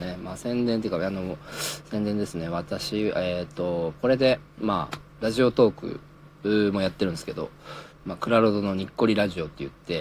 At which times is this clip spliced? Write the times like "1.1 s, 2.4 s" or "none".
4.5 s, 7.9 s